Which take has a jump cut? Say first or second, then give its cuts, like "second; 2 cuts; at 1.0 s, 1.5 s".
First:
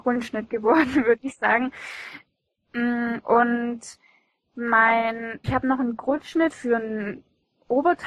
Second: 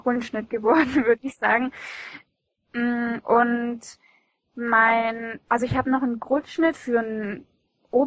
first; 1 cut; at 5.4 s